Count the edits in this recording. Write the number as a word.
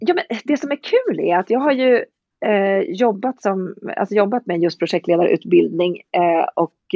zero